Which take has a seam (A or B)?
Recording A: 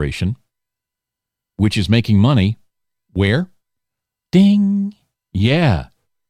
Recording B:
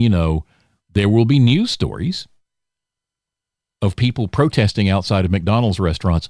A